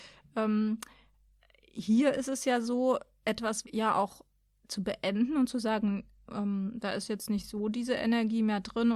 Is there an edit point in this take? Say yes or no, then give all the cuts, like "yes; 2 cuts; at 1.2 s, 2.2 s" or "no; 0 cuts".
yes; 1 cut; at 3.6 s